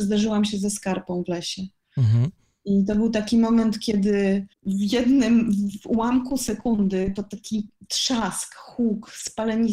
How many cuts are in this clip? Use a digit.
1